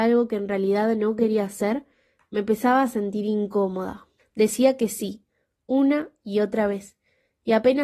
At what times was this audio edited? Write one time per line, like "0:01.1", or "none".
0:04.2